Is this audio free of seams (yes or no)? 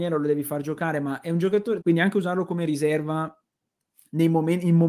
no